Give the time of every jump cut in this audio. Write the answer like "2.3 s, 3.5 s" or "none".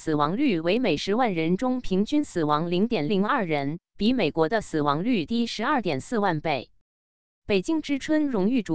3.1 s

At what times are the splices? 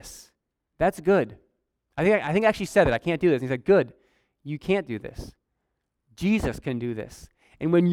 none

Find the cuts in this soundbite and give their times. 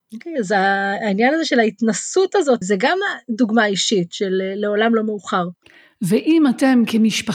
2.6 s

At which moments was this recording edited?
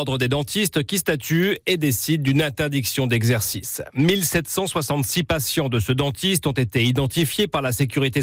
none

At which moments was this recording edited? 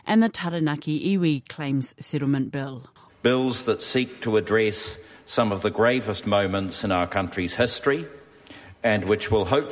3.1 s

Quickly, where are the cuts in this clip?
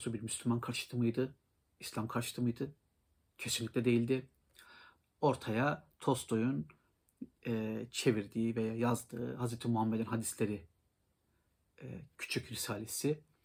5.0 s

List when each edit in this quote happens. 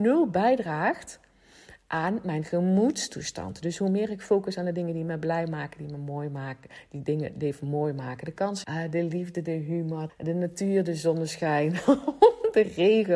8.6 s, 10.1 s

